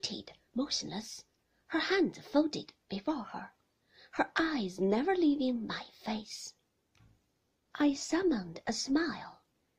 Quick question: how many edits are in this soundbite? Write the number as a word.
zero